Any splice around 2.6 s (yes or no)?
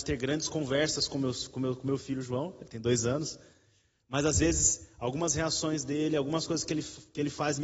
no